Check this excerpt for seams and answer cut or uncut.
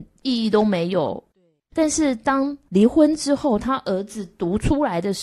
uncut